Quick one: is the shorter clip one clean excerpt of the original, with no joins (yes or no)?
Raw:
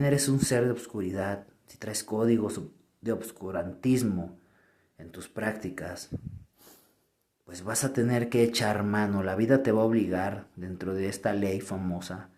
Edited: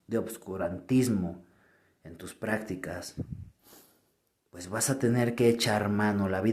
yes